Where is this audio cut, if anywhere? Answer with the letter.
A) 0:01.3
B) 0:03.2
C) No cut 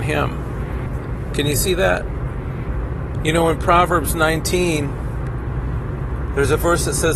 C